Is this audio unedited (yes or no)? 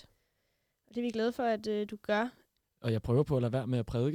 no